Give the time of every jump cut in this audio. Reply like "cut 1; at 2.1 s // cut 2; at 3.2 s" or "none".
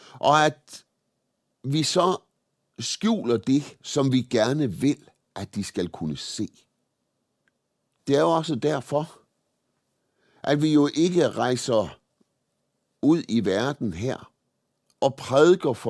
cut 1; at 8.0 s